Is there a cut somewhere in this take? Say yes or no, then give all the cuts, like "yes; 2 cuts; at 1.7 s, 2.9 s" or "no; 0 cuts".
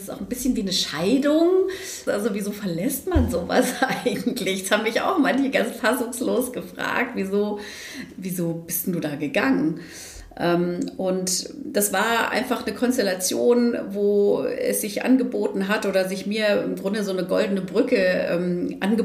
yes; 1 cut; at 2.1 s